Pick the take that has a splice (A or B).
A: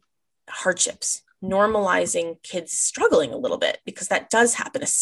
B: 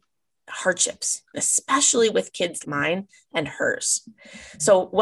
B